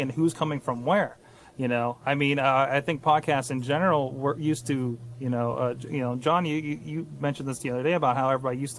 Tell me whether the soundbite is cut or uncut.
uncut